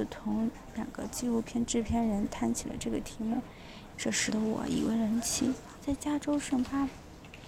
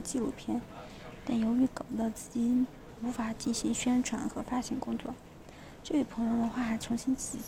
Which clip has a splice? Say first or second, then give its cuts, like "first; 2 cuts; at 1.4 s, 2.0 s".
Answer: first; 2 cuts; at 3.9 s, 5.7 s